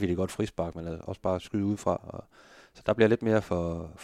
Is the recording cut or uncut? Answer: uncut